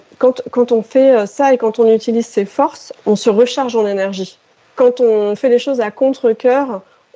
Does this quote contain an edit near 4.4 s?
no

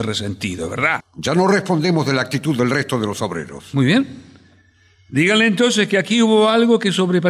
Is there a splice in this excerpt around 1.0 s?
yes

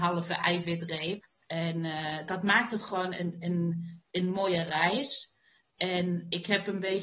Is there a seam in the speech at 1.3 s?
yes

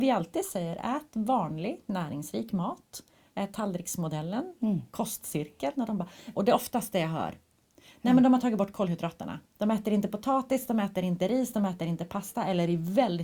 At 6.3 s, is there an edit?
yes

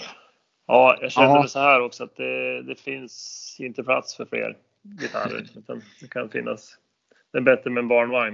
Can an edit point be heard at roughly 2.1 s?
no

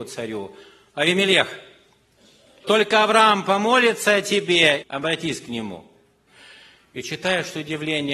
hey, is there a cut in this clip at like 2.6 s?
yes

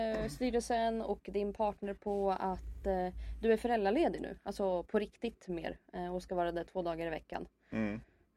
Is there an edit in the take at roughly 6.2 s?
no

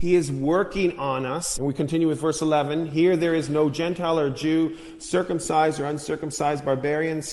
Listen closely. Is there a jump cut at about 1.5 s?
yes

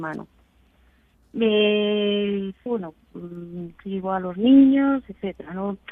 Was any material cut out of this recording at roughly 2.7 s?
yes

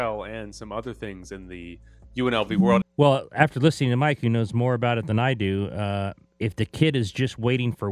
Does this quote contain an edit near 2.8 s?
yes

